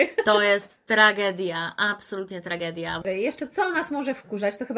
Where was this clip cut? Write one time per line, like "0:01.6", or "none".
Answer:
0:03.0